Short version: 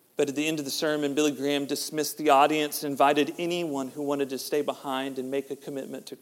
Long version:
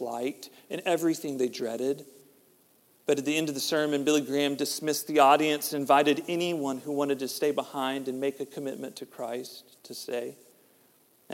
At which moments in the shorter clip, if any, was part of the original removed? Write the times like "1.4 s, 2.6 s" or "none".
none

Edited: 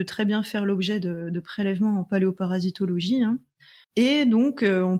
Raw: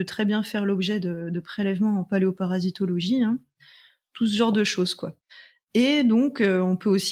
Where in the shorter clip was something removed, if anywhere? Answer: 3.8 s

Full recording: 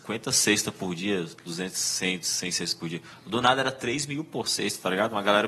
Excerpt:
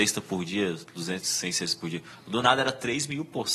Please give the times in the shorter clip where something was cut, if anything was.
1.2 s

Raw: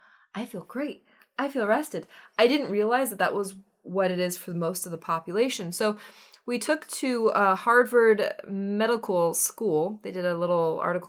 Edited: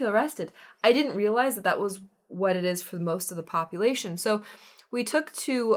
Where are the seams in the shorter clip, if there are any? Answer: none

